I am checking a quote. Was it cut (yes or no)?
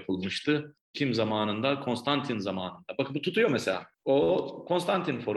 yes